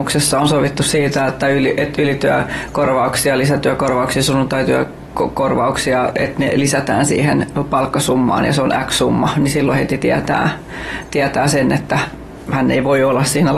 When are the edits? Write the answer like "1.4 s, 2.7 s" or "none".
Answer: none